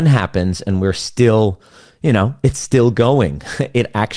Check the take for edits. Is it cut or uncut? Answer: uncut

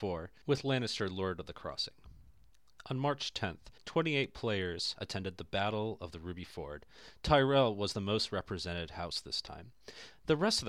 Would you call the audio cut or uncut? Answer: cut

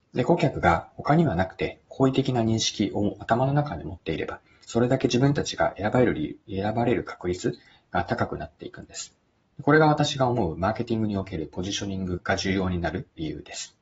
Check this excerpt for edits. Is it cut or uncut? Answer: cut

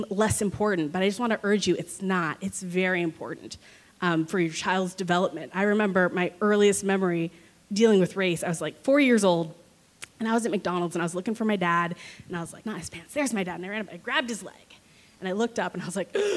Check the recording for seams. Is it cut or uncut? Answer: cut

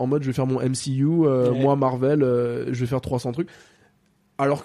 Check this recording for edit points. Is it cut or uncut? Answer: uncut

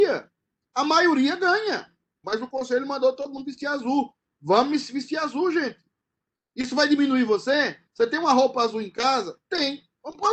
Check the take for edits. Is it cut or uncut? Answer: cut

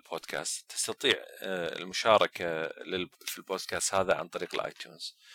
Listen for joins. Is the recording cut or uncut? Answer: cut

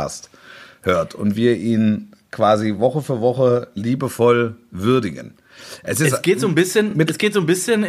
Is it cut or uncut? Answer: uncut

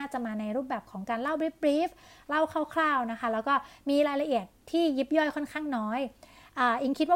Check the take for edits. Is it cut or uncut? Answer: uncut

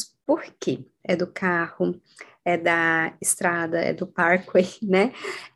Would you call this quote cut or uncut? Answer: cut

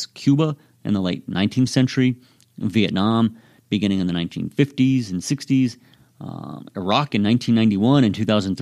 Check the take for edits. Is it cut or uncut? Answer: uncut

